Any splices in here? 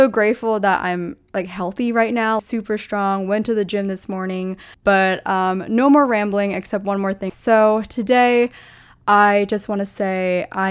yes; 3 cuts; at 2.4 s, 4.8 s, 7.3 s

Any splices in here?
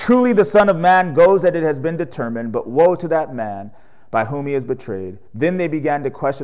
yes; 1 cut; at 5.3 s

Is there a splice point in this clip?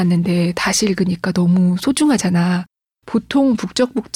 yes; 1 cut; at 3.0 s

